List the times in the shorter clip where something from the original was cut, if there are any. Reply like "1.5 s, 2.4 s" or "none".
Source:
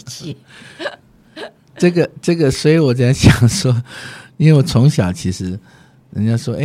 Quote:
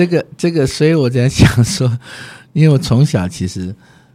none